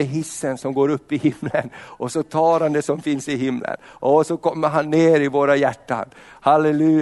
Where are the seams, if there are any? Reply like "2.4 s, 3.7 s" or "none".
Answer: none

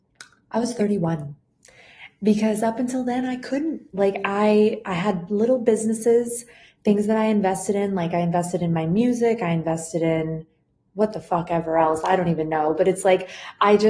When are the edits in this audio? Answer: none

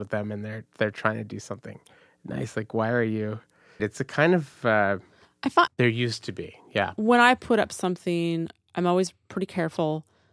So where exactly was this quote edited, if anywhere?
3.8 s, 5.7 s, 7.0 s

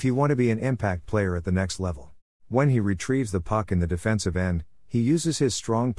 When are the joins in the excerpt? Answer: 2.4 s

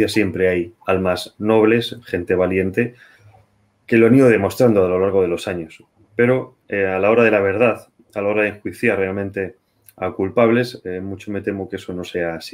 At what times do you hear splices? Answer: none

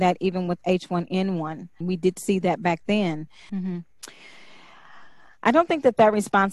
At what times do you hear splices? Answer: 1.8 s, 3.5 s

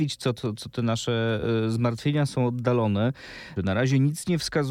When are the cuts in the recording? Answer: 3.6 s

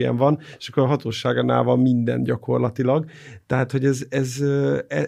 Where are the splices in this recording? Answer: none

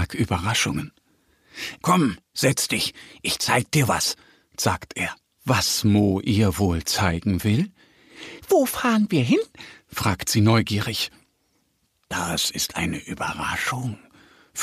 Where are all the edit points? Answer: 1.8 s, 5.4 s

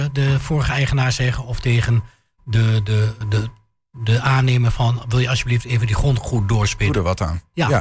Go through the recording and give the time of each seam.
3.2 s

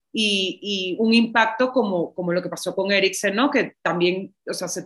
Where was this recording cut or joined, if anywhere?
none

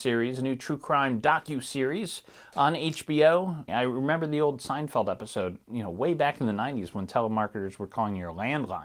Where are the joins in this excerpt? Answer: 3.7 s

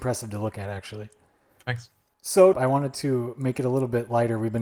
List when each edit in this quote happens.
2.5 s

